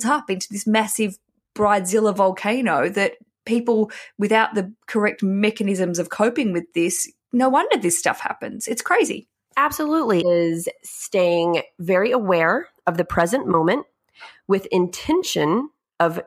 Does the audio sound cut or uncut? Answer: cut